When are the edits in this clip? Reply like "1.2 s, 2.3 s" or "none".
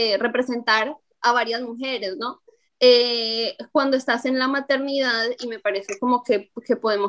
2.6 s